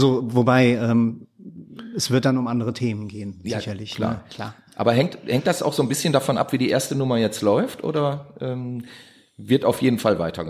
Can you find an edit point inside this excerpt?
no; 0 cuts

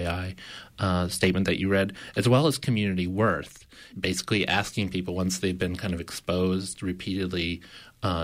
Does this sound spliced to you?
yes; 1 cut; at 3.9 s

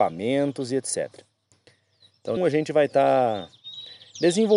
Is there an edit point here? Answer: yes; 1 cut; at 2.4 s

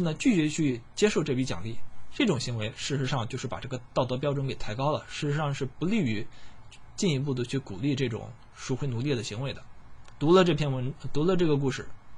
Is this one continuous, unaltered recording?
no; 1 cut; at 10.1 s

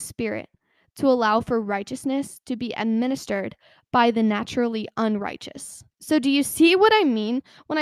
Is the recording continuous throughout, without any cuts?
no; 1 cut; at 5.9 s

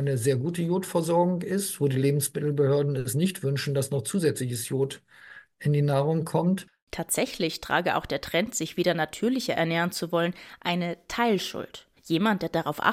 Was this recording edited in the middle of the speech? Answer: yes; 1 cut; at 12.0 s

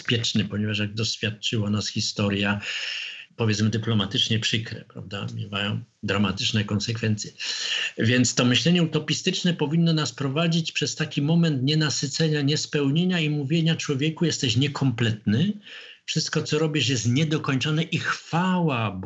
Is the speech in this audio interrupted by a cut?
yes; 1 cut; at 3.3 s

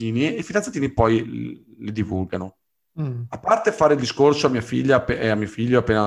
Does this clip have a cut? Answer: no; 0 cuts

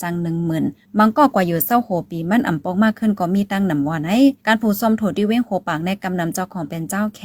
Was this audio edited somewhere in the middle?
no; 0 cuts

